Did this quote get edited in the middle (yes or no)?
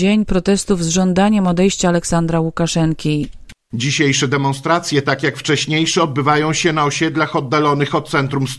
no